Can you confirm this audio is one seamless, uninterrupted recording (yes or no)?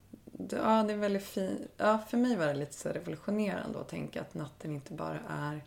yes